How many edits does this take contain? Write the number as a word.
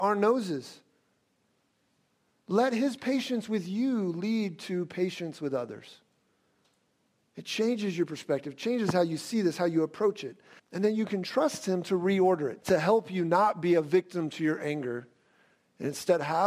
two